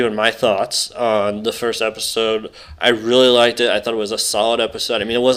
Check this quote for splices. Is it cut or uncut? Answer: uncut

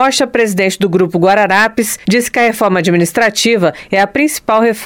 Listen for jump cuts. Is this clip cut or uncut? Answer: cut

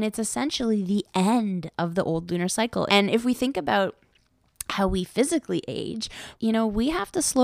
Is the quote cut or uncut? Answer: cut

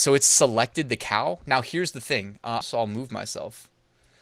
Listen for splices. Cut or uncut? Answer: cut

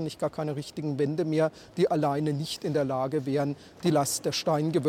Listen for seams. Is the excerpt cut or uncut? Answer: cut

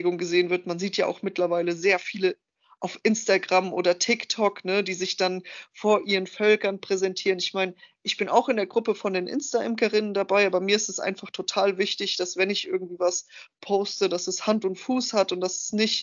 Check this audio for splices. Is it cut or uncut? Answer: uncut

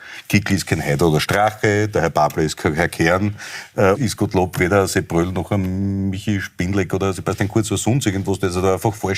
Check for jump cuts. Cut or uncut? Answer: cut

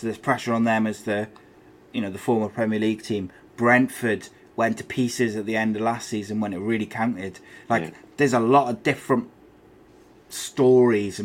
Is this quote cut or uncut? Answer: uncut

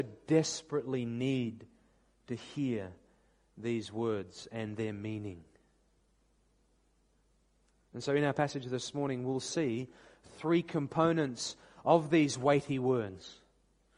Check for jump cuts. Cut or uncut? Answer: uncut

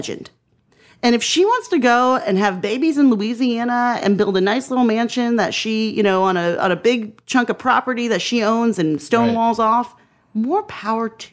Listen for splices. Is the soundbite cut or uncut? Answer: uncut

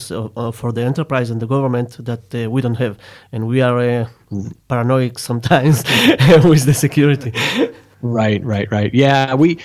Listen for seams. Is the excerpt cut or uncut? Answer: uncut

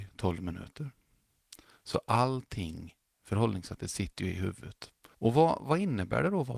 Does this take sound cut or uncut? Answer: cut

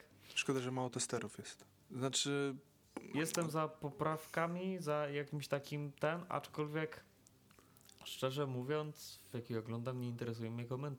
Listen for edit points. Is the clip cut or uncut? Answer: cut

